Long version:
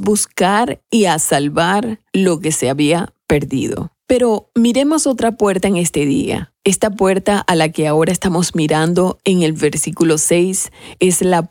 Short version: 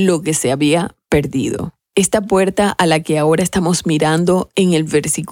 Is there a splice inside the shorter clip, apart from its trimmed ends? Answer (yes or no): yes